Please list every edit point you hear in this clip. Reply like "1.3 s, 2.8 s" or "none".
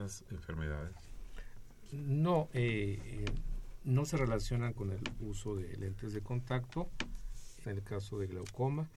7.6 s